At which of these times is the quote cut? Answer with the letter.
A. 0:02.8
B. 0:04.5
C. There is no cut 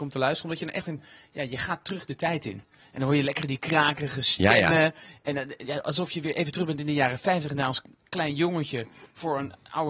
C